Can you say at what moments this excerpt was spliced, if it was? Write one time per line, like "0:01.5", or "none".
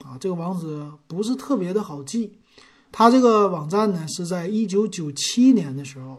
0:02.9